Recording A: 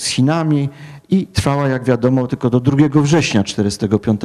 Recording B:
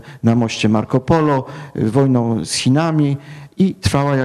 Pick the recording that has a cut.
A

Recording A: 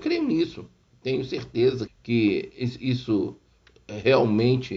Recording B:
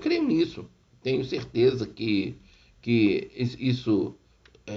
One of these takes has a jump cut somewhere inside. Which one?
A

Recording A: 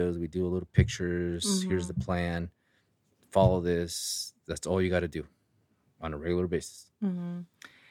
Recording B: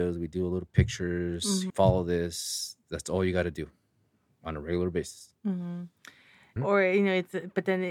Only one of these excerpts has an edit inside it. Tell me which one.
B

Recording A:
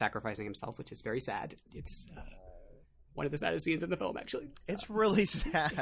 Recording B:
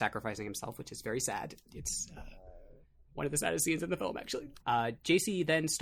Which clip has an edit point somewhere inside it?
B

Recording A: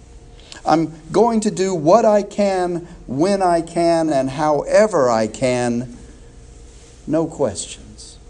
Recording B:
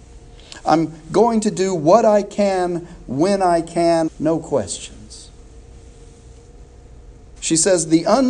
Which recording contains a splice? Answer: B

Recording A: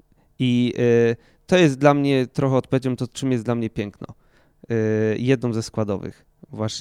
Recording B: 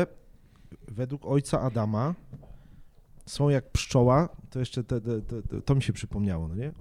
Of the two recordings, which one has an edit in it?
B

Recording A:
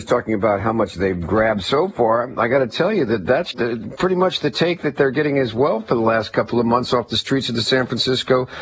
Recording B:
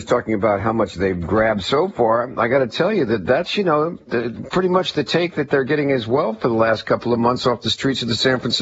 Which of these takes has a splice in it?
A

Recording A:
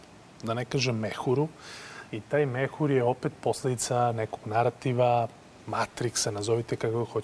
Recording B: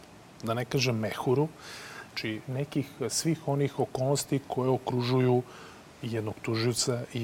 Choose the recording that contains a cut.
B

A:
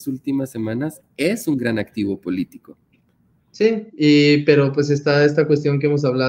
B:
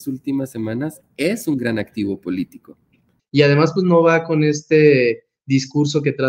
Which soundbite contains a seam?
B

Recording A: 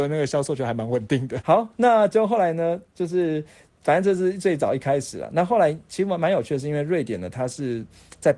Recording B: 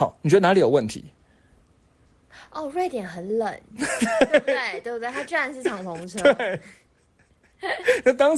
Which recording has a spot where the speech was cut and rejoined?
A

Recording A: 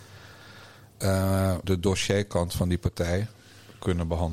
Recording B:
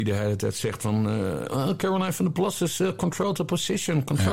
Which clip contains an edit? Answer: A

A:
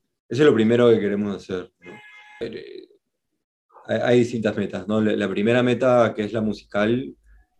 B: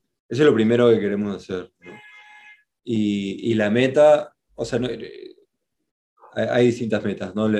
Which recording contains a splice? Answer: A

